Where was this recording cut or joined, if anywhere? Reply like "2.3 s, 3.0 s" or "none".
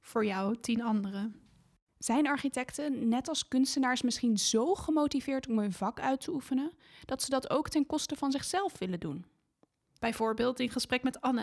1.9 s, 10.0 s